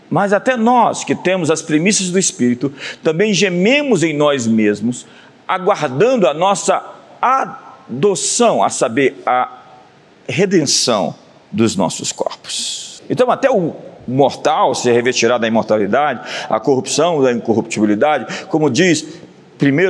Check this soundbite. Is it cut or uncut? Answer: uncut